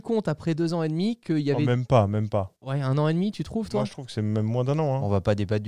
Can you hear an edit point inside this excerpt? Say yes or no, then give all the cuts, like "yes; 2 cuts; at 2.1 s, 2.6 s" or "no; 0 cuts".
yes; 1 cut; at 2.6 s